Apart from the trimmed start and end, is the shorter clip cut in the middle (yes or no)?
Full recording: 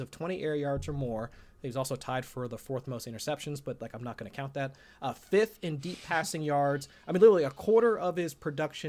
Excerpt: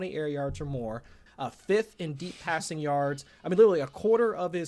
yes